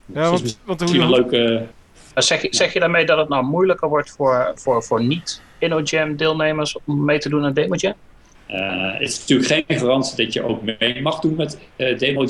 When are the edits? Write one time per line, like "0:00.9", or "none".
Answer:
0:08.3